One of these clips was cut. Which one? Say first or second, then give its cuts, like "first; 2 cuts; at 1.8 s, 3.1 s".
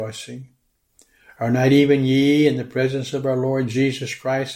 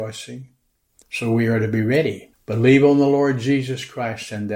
second; 2 cuts; at 1.0 s, 2.3 s